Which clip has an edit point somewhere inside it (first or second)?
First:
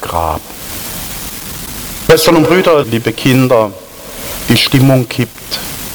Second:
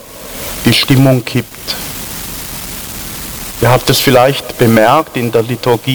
first